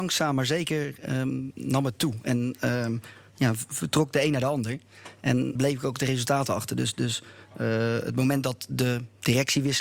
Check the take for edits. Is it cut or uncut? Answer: cut